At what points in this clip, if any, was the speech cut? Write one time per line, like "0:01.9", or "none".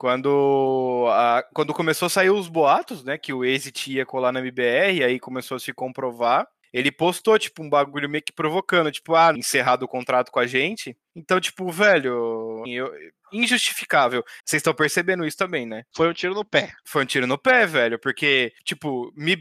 0:09.3
0:12.6
0:14.4